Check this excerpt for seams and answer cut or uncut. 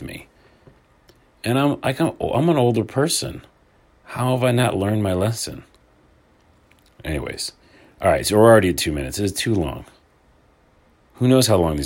uncut